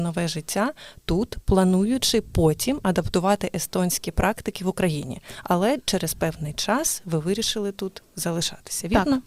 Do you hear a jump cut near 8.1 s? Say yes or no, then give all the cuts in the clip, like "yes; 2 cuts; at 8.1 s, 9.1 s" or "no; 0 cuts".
no; 0 cuts